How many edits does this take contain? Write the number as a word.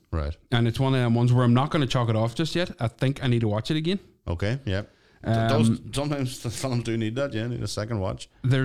zero